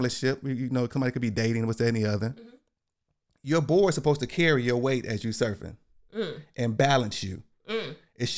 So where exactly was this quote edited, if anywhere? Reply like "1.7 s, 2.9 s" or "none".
none